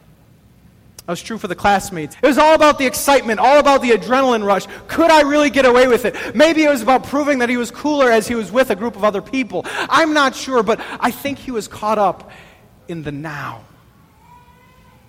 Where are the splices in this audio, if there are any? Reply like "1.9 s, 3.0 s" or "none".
2.1 s

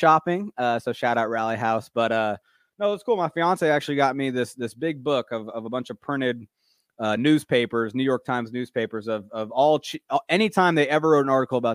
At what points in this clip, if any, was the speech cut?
none

